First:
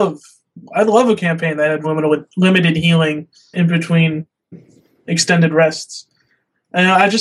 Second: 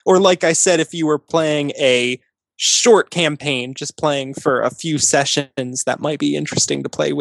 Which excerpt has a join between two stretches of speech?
first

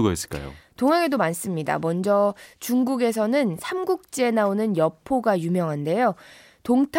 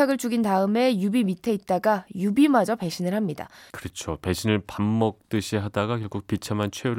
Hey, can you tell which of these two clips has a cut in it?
second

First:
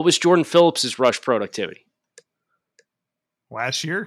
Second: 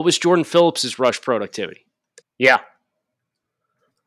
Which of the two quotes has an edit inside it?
second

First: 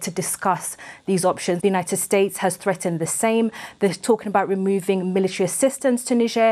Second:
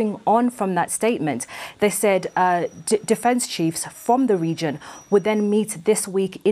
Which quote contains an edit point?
first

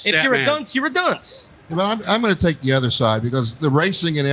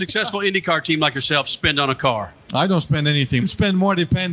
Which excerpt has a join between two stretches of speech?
second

